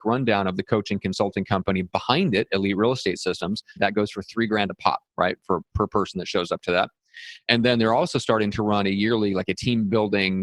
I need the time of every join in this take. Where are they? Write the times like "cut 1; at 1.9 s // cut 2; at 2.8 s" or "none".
cut 1; at 3.8 s